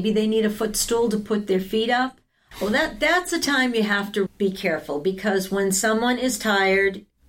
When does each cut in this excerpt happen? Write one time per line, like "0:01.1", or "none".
0:02.5
0:04.3